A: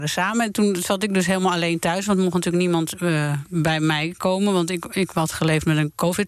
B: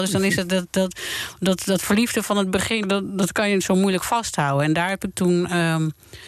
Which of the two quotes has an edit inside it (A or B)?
B